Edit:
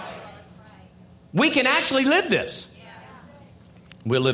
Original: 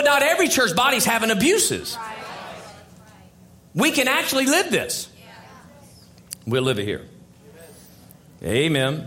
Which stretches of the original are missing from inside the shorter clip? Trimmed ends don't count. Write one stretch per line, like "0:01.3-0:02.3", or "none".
none